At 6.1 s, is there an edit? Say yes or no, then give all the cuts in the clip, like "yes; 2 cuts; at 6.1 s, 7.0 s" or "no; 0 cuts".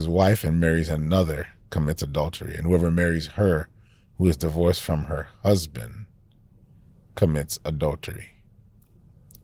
no; 0 cuts